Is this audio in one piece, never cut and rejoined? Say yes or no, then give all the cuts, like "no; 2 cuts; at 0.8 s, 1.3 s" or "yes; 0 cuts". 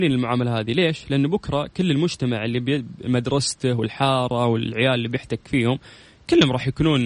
yes; 0 cuts